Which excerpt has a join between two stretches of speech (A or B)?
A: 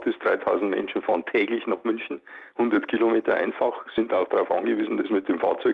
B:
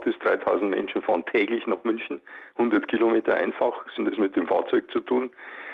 B